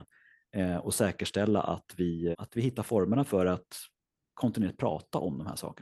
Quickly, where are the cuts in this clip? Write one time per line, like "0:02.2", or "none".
0:02.3